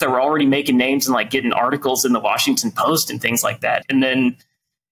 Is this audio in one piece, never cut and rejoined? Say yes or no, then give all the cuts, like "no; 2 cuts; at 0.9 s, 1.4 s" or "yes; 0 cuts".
no; 1 cut; at 3.8 s